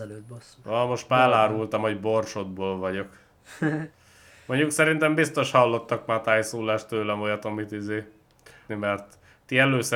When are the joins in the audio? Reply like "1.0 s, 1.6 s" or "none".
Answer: 8.7 s